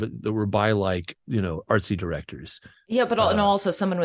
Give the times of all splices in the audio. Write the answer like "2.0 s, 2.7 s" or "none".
1.2 s